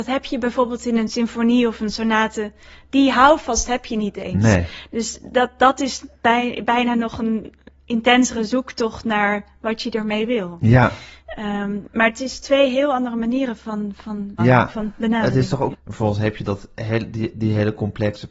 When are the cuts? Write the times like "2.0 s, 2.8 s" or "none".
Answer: 14.4 s, 15.7 s